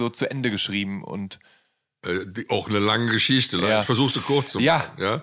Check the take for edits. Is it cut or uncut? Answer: uncut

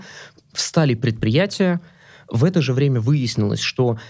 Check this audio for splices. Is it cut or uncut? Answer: uncut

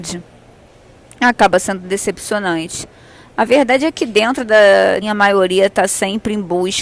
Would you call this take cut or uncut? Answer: cut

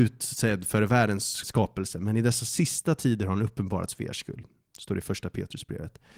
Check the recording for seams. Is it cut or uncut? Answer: cut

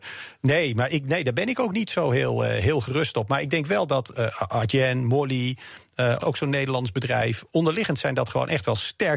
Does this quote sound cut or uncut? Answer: cut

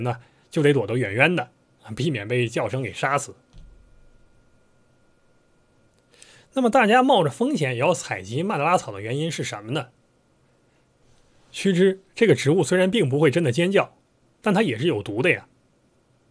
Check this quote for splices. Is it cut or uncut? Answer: uncut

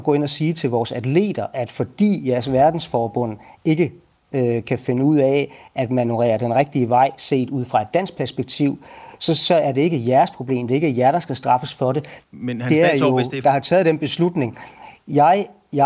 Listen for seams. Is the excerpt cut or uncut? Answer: cut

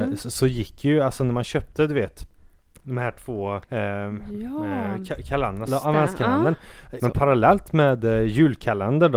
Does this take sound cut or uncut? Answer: cut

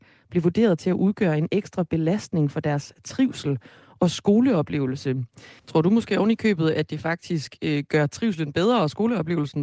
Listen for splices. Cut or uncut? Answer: cut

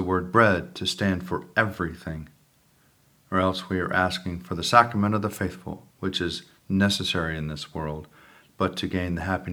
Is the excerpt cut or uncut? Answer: cut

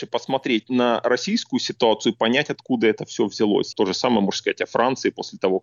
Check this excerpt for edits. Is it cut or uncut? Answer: cut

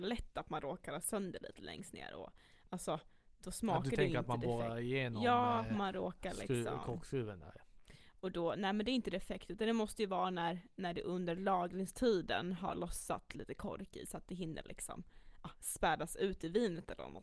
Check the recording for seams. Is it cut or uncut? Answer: uncut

